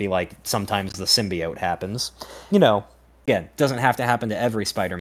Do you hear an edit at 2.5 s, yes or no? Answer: yes